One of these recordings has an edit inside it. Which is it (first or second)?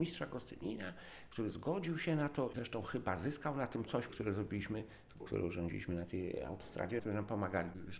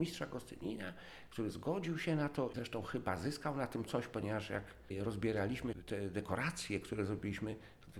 first